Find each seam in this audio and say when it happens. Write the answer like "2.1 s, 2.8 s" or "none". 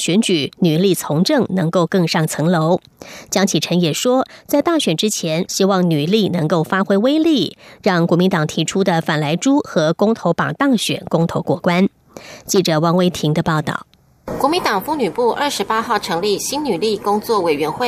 5.5 s